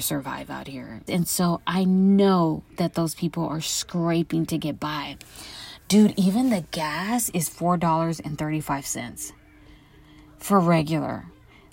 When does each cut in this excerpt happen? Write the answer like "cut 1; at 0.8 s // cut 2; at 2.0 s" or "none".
cut 1; at 1.1 s

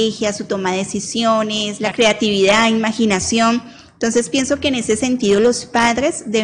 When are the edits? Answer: cut 1; at 1.9 s

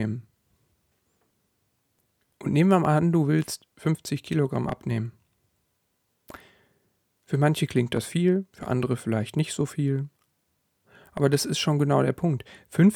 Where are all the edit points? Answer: none

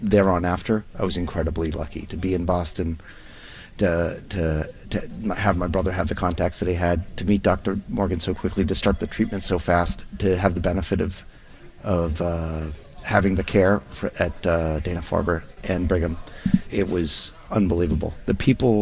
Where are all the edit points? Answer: cut 1; at 16.7 s

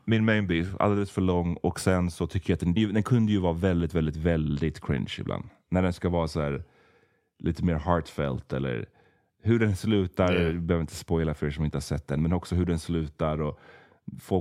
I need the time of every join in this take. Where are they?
cut 1; at 2.8 s

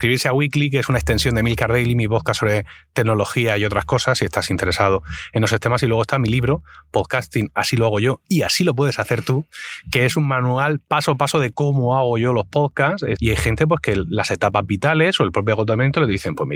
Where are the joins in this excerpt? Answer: cut 1; at 13.2 s

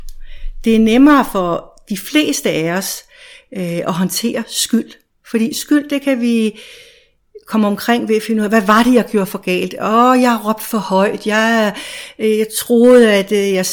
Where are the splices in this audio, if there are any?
none

